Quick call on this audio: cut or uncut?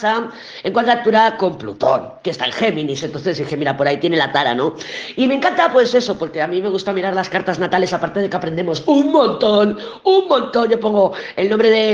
uncut